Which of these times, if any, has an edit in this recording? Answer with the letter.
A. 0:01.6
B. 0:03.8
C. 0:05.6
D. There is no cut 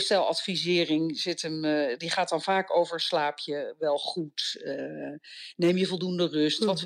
D